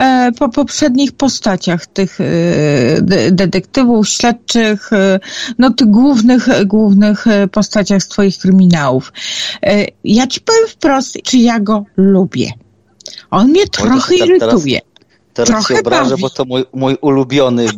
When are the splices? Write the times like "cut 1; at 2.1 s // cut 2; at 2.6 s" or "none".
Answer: cut 1; at 11.2 s